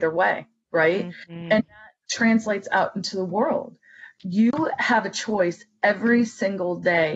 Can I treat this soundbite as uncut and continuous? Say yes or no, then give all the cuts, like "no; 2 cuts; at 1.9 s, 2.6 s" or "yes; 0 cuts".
yes; 0 cuts